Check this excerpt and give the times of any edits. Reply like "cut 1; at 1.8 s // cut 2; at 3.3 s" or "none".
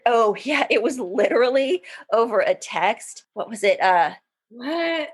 cut 1; at 3.3 s